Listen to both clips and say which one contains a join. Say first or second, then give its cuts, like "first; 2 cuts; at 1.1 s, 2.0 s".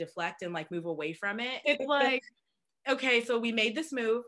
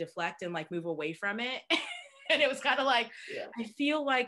first; 1 cut; at 1.6 s